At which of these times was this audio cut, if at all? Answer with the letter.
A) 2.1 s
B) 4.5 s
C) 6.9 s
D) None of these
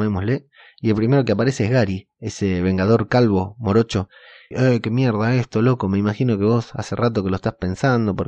B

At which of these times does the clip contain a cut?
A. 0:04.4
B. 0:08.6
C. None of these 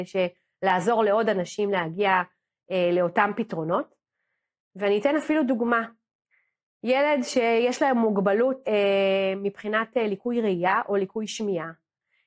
B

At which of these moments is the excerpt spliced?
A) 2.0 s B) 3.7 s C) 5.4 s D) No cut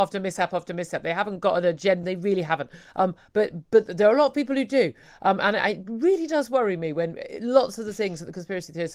A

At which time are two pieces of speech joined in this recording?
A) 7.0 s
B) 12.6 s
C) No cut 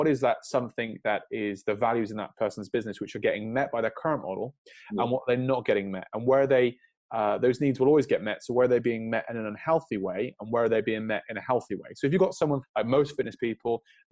B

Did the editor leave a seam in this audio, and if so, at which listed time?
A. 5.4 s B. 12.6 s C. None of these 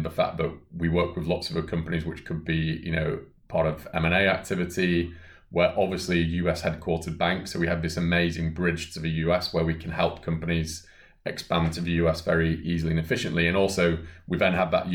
B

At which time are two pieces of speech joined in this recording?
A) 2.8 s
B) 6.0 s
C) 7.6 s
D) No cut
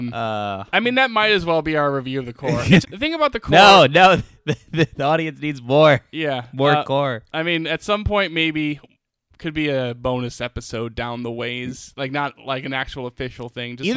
A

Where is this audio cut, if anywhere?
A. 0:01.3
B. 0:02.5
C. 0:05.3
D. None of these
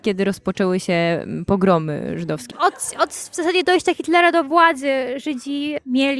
B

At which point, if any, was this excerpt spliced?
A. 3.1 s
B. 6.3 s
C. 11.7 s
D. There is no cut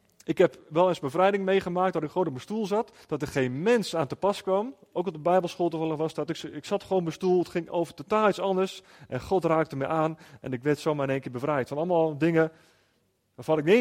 B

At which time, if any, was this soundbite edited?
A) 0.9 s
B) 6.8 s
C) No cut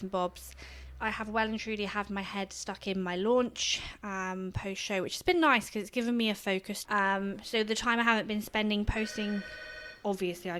B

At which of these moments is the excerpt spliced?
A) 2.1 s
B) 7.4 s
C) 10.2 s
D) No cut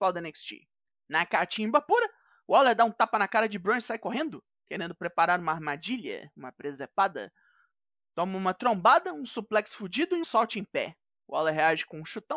C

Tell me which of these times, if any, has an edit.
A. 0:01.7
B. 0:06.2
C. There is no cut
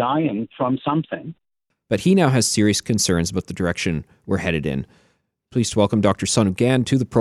A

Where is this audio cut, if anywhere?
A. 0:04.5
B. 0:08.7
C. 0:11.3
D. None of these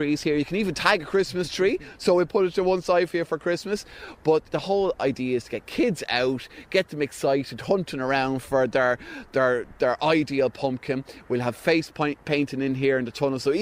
A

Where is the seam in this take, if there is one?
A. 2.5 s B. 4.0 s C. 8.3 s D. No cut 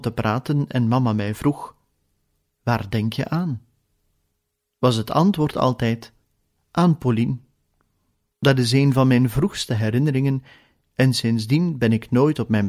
C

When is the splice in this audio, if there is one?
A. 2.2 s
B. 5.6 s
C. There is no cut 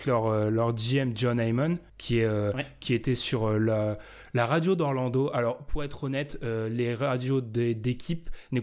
C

